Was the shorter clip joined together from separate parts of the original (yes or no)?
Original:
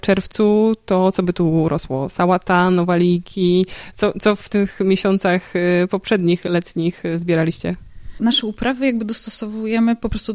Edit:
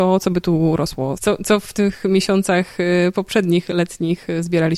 yes